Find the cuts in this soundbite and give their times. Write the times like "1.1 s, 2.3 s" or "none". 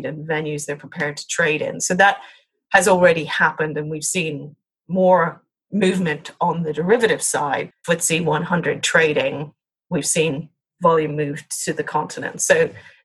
7.7 s